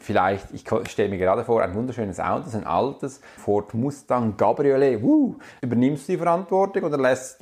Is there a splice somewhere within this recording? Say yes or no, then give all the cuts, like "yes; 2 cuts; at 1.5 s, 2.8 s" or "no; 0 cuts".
yes; 2 cuts; at 3.4 s, 5.6 s